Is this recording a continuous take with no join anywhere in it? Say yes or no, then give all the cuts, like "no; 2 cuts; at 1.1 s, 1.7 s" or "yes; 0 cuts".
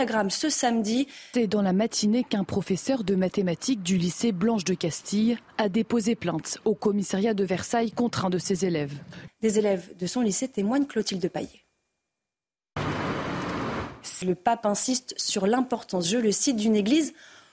no; 3 cuts; at 1.3 s, 9.3 s, 14.2 s